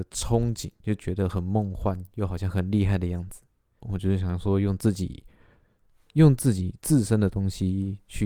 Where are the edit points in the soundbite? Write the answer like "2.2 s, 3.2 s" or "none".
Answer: 3.8 s